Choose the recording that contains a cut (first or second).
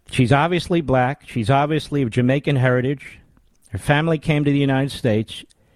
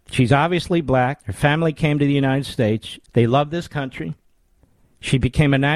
second